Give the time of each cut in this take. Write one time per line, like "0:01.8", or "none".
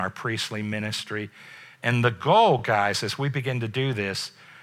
none